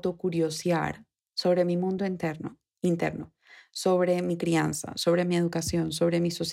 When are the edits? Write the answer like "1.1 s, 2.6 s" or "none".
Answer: none